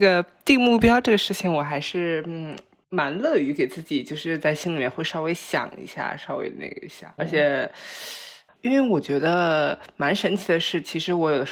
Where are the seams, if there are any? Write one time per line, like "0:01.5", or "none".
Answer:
0:07.2